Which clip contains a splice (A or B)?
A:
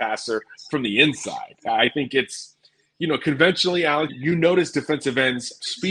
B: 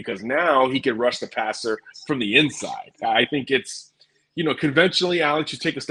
A